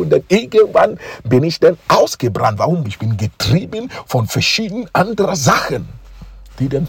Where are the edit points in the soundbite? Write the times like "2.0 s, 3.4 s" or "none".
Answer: 2.8 s